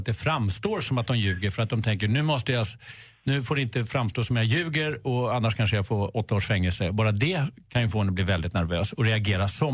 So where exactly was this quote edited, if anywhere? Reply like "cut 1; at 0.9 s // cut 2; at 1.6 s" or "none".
none